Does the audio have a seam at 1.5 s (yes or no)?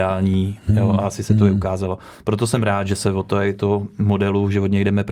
no